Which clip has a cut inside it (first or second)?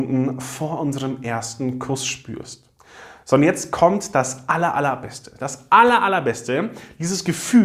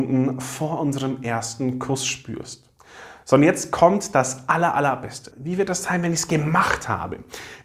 second